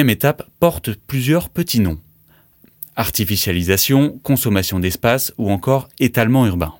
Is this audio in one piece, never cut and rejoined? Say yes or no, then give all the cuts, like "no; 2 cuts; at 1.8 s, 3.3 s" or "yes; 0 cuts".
yes; 0 cuts